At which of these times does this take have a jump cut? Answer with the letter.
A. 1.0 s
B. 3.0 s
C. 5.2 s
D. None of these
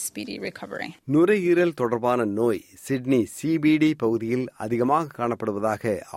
A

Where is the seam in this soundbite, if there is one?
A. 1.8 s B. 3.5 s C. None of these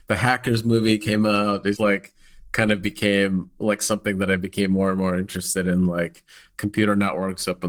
A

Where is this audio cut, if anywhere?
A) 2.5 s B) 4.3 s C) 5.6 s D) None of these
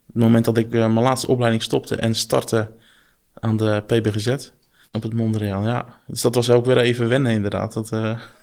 D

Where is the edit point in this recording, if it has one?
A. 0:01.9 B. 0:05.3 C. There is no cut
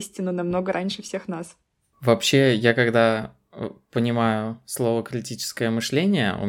A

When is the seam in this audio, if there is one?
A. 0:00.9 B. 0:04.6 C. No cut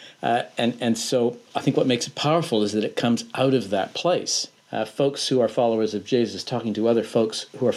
B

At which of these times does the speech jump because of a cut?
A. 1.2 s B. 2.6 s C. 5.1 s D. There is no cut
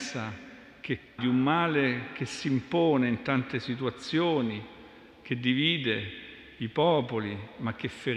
A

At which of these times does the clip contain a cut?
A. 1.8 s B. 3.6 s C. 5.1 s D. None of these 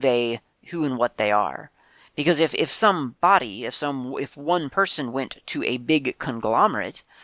D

